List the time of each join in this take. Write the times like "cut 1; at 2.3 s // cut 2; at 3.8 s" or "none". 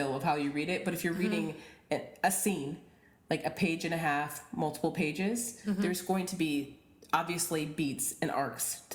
none